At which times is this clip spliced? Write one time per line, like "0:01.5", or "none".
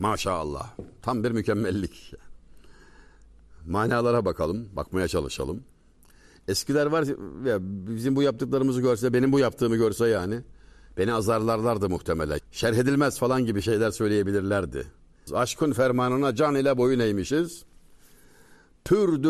0:12.4
0:15.3